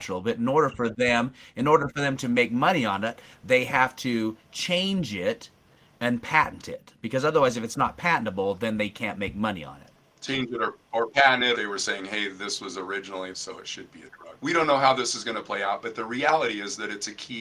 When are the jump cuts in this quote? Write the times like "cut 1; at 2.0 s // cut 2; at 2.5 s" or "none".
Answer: cut 1; at 11.5 s // cut 2; at 13.3 s // cut 3; at 14.4 s